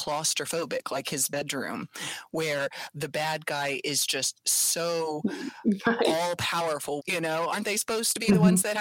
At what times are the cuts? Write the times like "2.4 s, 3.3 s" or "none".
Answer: 7.0 s